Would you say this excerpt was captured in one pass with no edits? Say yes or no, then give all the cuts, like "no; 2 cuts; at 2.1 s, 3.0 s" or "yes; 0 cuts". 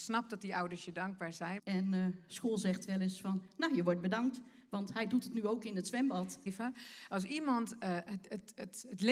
no; 2 cuts; at 1.6 s, 6.5 s